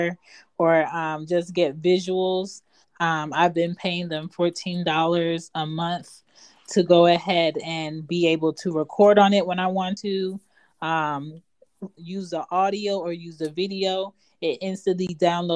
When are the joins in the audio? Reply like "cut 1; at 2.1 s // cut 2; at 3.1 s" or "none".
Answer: cut 1; at 2.8 s // cut 2; at 12.0 s